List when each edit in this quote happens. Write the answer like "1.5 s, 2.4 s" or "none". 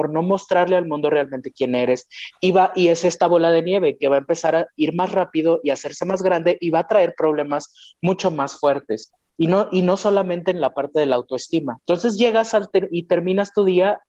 11.8 s